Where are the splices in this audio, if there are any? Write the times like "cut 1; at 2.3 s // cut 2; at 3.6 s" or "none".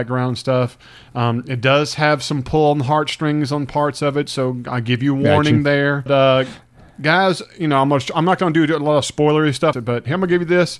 cut 1; at 6.1 s // cut 2; at 9.7 s